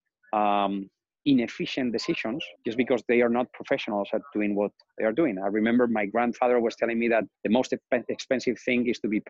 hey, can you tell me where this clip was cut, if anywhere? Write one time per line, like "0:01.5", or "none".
0:01.2
0:02.5
0:07.3